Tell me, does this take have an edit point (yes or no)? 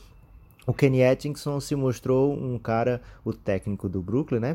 no